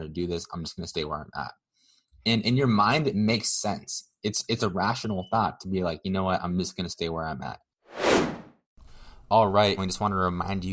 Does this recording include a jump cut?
yes; 1 cut; at 9.8 s

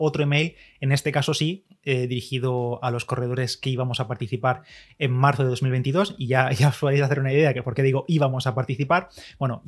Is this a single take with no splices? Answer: yes; 0 cuts

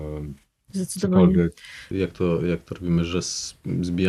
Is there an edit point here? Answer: yes; 1 cut; at 1.9 s

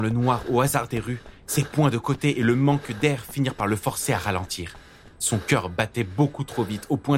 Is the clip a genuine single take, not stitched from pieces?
yes; 0 cuts

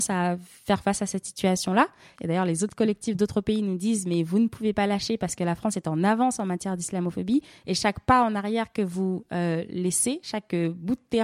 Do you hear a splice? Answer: yes; 1 cut; at 2.1 s

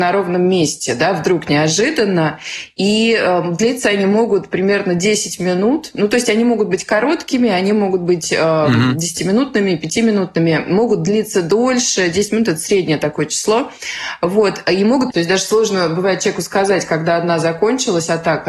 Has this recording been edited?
yes; 1 cut; at 15.1 s

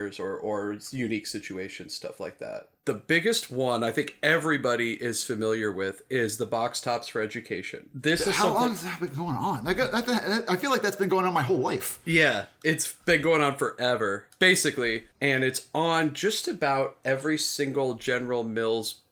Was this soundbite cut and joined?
yes; 1 cut; at 15.1 s

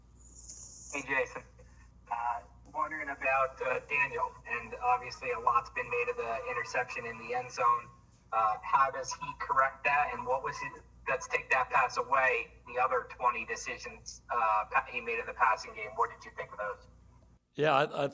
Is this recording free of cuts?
yes; 0 cuts

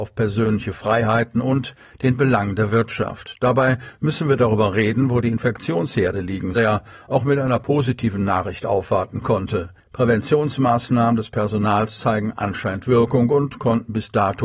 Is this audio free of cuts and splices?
no; 2 cuts; at 6.5 s, 9.8 s

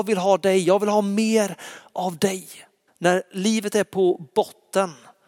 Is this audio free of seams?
no; 1 cut; at 2.9 s

